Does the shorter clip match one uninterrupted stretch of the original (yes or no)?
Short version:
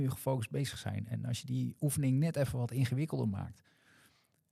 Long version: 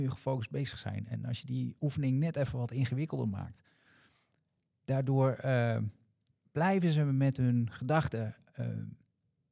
yes